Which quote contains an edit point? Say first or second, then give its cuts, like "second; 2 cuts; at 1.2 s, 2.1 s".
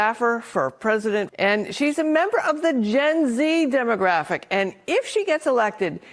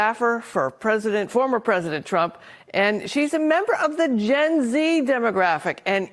first; 1 cut; at 1.3 s